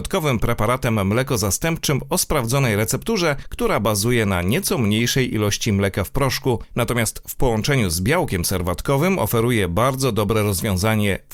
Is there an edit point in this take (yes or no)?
no